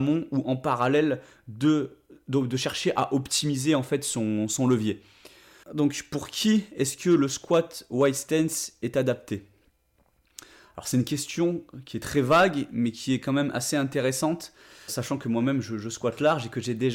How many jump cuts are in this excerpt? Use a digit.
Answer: 2